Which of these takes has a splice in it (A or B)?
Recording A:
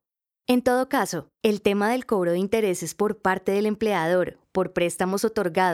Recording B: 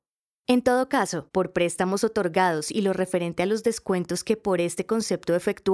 B